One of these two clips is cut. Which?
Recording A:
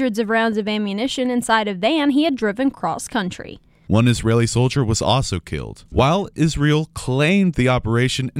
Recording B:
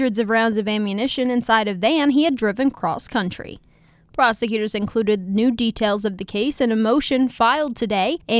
A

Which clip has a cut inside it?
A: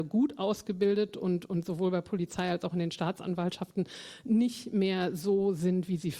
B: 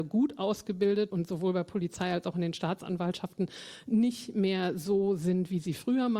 B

